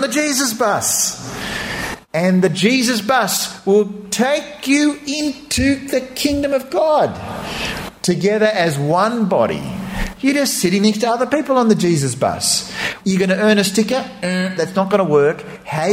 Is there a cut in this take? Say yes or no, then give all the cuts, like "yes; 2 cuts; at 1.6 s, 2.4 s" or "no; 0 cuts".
yes; 3 cuts; at 8.0 s, 10.2 s, 13.0 s